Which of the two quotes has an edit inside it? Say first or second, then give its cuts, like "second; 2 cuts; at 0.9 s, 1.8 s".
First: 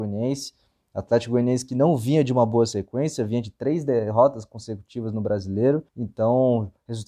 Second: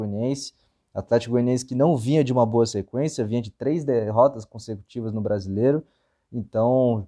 first; 1 cut; at 5.9 s